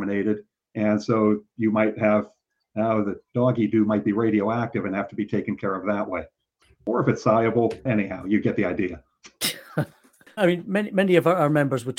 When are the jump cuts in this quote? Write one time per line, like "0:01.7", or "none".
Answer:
0:07.9
0:10.4